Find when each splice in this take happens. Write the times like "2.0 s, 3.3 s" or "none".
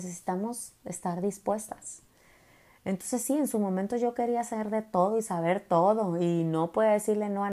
none

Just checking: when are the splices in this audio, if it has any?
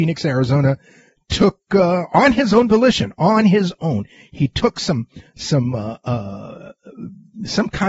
none

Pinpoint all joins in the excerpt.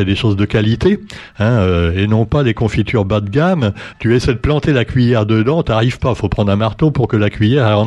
3.9 s

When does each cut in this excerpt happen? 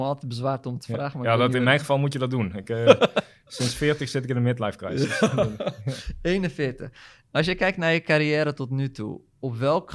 none

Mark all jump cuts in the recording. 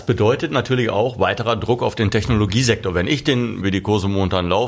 3.6 s

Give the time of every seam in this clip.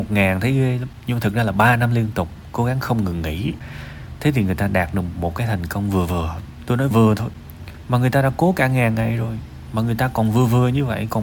6.9 s

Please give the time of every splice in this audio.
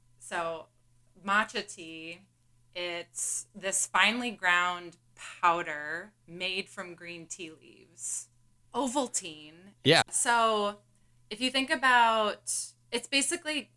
8.6 s, 10.0 s

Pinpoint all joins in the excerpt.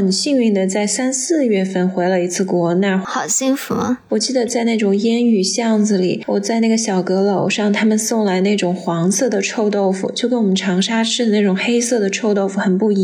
4.1 s

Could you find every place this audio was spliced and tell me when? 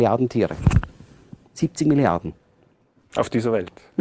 none

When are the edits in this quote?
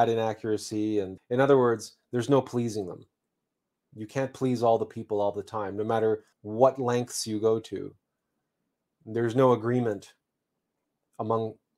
1.2 s, 6.3 s

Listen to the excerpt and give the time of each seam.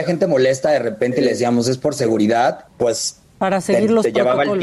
2.7 s

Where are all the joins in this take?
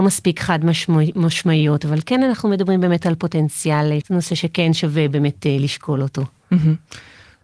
4.0 s

